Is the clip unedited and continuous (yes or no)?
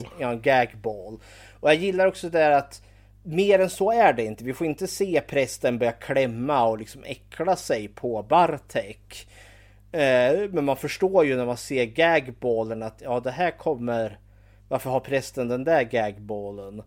yes